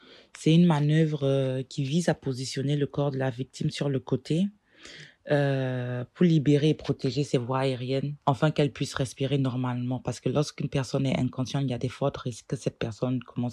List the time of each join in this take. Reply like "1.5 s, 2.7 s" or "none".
8.2 s